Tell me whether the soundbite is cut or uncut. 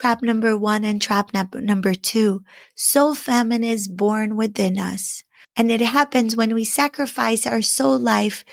cut